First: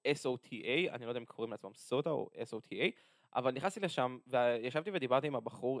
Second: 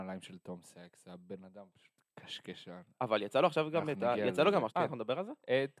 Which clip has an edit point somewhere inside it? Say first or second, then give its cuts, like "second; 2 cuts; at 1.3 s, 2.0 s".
second; 2 cuts; at 2.1 s, 4.7 s